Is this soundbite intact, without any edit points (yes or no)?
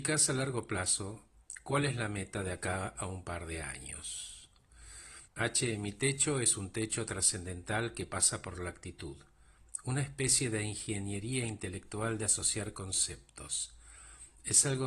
no